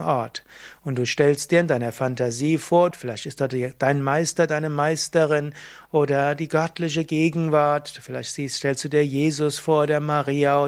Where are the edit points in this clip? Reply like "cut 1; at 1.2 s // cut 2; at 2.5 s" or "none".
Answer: cut 1; at 2.9 s